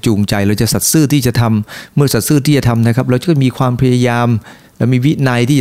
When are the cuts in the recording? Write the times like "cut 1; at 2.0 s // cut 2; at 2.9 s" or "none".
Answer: none